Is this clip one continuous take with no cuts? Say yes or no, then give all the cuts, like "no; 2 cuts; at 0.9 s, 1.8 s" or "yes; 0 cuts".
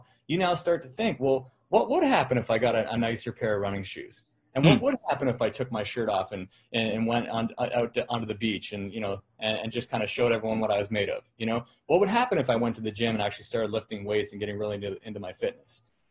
yes; 0 cuts